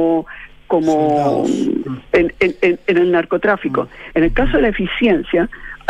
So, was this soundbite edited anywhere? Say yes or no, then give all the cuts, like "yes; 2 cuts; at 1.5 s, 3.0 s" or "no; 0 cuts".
yes; 1 cut; at 4.1 s